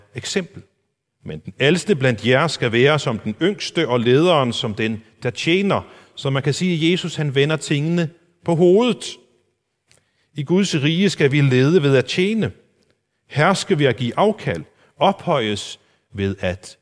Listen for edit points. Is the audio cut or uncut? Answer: cut